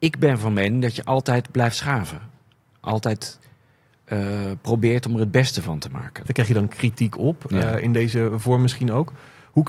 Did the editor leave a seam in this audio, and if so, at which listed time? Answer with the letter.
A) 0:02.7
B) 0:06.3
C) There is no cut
B